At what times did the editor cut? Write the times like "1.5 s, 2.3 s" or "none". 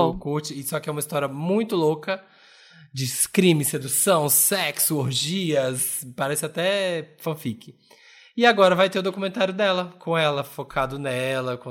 none